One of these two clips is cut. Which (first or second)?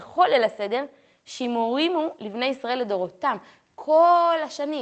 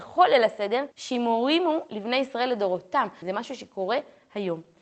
second